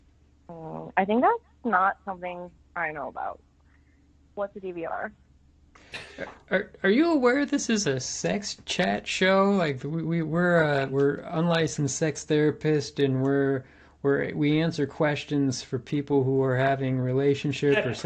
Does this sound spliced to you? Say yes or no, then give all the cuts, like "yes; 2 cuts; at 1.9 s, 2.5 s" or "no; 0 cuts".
no; 0 cuts